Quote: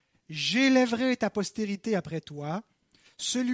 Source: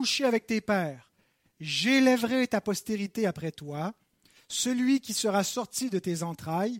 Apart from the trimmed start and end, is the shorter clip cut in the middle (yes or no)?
no